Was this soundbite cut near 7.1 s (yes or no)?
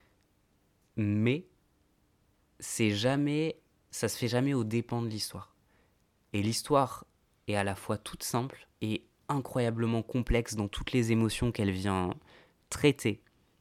no